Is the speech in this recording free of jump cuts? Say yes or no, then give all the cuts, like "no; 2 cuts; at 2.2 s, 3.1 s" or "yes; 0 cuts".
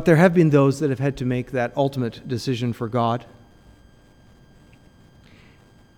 yes; 0 cuts